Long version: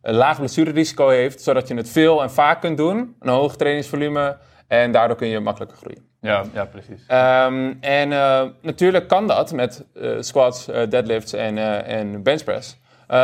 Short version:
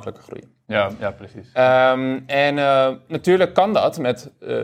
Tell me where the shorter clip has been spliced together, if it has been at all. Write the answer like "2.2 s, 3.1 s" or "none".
none

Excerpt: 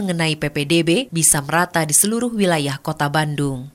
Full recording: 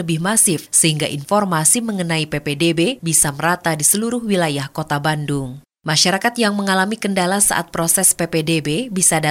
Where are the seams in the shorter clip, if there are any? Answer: none

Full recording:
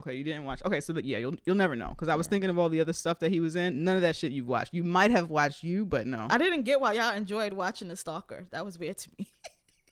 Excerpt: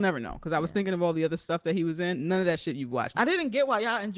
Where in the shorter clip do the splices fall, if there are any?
3.1 s

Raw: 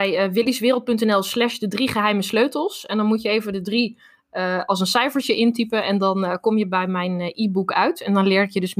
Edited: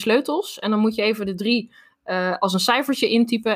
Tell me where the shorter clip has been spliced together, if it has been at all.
none

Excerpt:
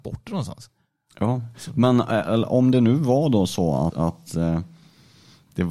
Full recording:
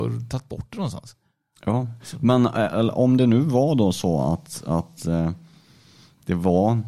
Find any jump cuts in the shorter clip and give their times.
3.9 s

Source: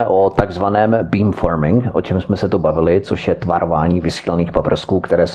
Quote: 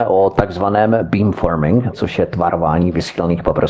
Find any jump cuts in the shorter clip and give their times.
1.9 s

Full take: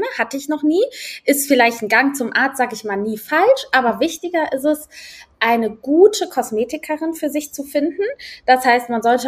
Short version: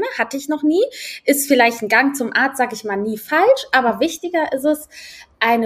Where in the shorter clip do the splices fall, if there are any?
none

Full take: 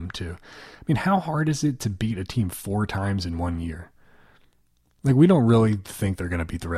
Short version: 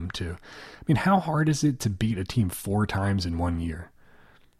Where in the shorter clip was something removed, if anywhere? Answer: none

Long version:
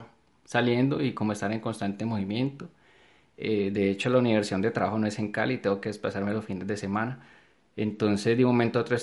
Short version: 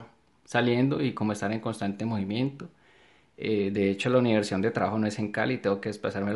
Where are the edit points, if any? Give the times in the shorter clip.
none

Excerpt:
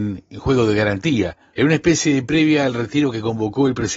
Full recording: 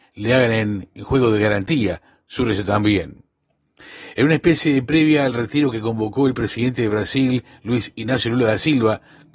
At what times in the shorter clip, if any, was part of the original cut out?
1.5 s

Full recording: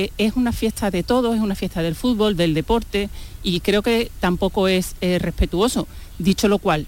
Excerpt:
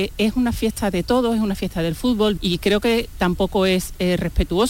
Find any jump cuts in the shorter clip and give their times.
2.4 s

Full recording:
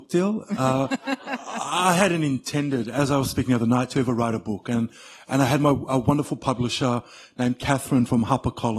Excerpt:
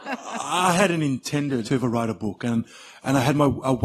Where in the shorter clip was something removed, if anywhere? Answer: 1.6 s

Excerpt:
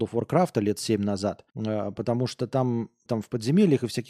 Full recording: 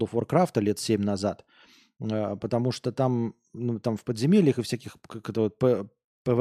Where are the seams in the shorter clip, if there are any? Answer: 1.5 s, 3.1 s

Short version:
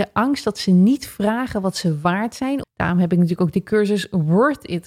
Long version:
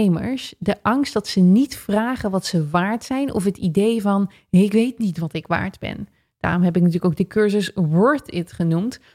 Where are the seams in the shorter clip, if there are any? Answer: 2.6 s

